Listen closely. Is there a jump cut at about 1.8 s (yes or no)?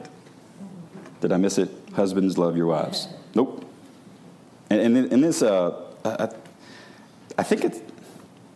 yes